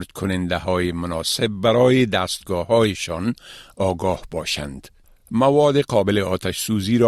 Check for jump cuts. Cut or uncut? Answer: uncut